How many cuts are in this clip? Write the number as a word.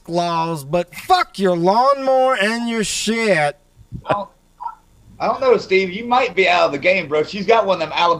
one